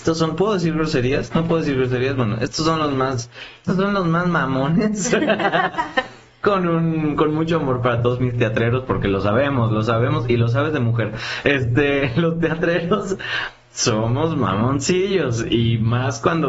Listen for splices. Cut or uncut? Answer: uncut